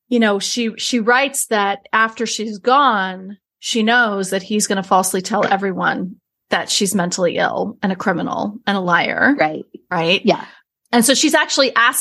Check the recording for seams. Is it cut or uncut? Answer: uncut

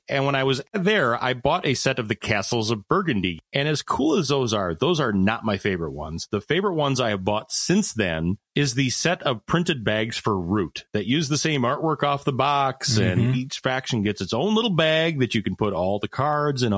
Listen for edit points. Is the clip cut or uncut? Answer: uncut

